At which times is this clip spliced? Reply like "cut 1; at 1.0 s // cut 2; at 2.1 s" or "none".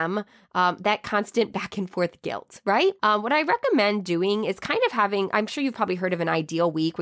cut 1; at 3.0 s

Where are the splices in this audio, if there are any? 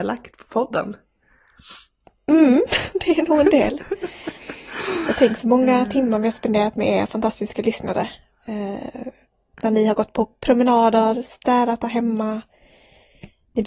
none

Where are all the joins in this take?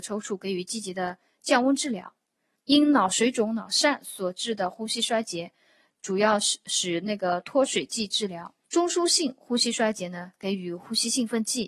cut 1; at 2.5 s // cut 2; at 8.6 s

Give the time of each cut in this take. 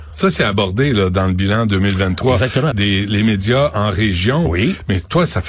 cut 1; at 2.7 s

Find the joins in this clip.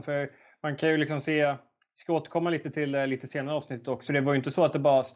cut 1; at 4.1 s

